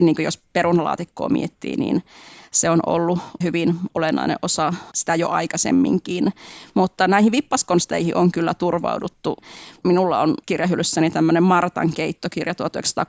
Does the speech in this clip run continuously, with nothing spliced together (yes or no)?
yes